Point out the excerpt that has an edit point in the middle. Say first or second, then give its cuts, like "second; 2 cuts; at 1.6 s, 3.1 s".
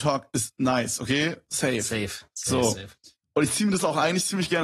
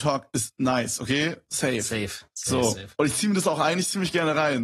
second; 1 cut; at 2.9 s